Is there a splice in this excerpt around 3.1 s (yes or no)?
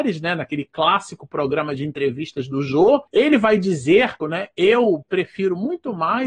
yes